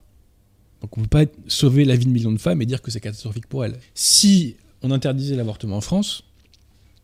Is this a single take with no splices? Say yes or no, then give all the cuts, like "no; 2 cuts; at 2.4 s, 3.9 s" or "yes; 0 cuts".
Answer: no; 1 cut; at 3.8 s